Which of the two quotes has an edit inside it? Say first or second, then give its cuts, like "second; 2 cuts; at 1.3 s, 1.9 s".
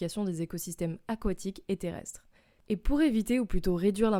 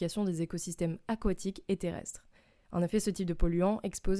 first; 1 cut; at 2.6 s